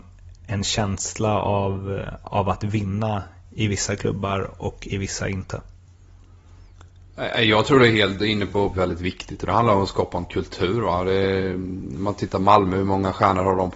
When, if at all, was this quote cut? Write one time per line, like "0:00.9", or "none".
0:08.7